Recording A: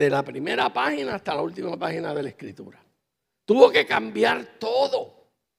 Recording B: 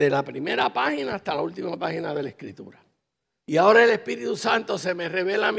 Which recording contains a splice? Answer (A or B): B